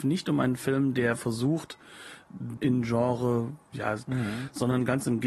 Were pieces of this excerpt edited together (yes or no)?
yes